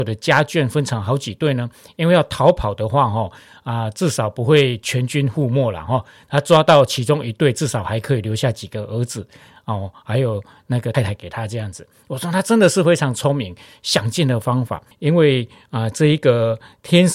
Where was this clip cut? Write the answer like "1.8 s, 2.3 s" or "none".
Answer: 10.9 s, 14.9 s